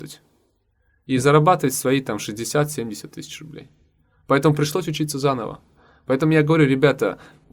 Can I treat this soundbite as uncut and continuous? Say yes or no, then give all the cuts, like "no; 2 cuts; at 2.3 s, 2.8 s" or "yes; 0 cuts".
yes; 0 cuts